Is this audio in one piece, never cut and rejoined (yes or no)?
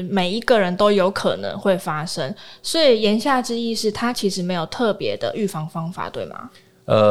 yes